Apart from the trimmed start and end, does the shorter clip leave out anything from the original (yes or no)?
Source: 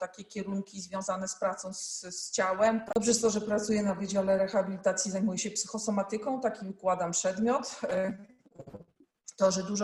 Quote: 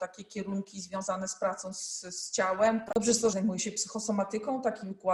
yes